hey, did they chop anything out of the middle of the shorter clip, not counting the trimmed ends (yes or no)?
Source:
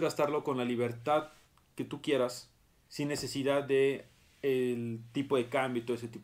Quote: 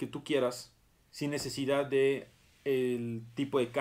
no